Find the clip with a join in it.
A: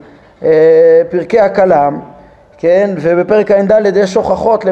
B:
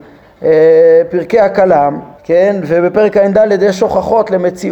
B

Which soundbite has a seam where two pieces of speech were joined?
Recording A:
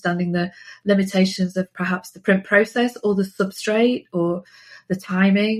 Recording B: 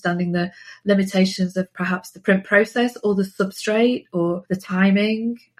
B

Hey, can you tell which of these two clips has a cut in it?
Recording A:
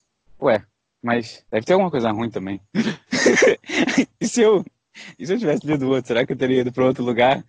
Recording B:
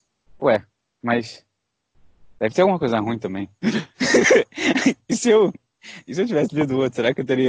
A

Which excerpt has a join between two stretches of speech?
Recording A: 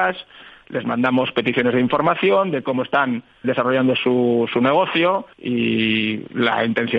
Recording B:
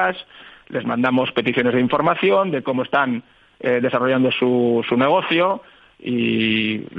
A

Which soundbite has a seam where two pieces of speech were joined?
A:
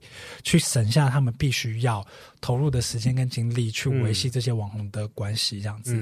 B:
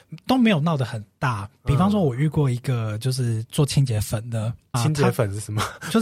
B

